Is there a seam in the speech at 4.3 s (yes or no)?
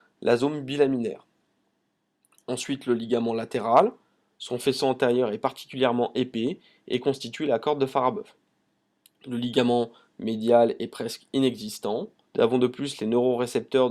no